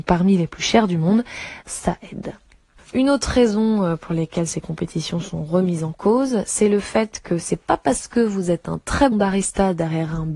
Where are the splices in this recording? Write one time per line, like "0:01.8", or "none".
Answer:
0:01.6
0:09.1